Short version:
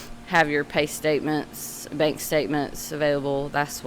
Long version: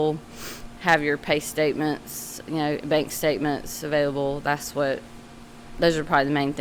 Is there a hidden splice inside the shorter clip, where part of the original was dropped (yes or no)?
yes